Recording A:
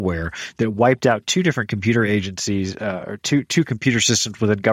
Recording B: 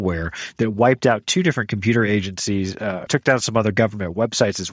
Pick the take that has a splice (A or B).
B